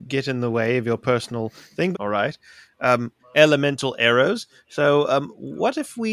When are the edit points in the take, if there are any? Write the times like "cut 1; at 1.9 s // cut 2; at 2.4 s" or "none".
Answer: cut 1; at 1.9 s // cut 2; at 3.2 s